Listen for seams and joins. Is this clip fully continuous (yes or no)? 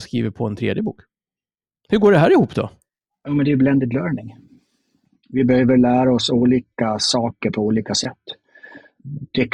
yes